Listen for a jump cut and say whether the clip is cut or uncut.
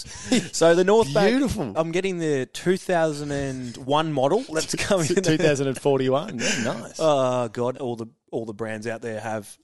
cut